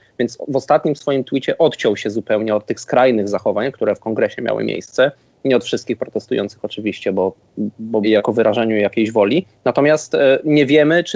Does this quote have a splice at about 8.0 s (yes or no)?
yes